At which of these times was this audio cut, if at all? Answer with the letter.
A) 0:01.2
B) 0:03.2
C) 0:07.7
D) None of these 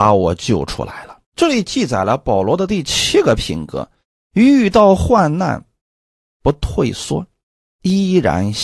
A